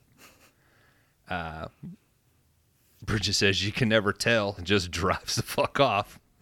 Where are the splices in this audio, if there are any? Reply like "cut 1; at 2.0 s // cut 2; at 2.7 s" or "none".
cut 1; at 4.6 s